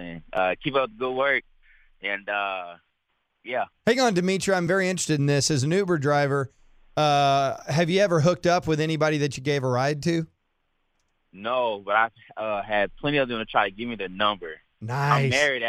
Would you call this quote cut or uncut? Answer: uncut